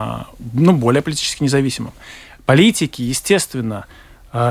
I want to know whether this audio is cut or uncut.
uncut